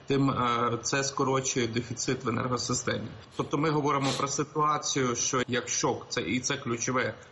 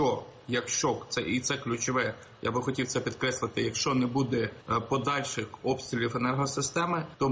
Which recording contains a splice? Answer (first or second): first